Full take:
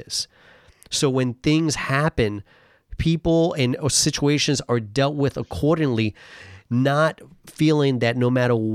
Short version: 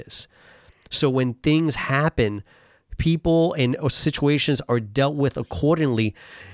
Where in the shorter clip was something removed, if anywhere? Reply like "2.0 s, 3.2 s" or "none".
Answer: none